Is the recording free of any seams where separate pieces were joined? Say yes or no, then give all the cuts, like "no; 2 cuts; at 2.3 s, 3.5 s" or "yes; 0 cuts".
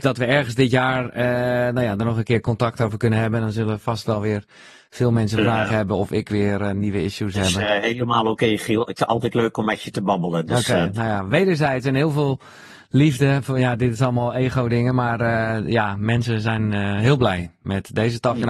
yes; 0 cuts